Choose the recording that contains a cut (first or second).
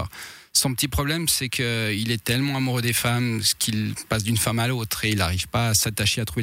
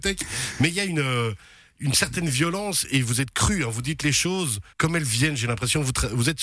second